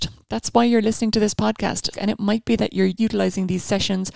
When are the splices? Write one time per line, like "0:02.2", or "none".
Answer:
0:01.9
0:03.0